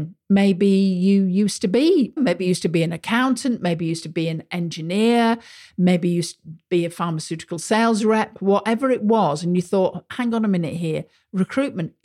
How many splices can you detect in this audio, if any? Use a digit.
1